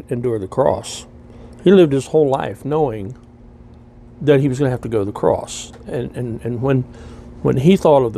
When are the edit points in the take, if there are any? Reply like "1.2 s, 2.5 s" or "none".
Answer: none